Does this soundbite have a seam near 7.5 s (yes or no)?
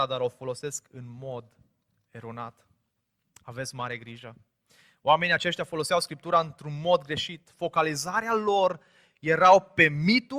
no